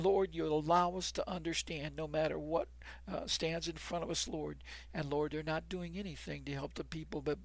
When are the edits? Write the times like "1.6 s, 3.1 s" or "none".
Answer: 4.9 s